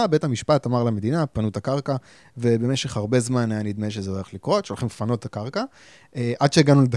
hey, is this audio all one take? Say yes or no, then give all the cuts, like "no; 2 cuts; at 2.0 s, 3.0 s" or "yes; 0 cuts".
yes; 0 cuts